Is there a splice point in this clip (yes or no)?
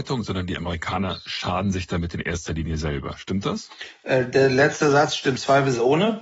no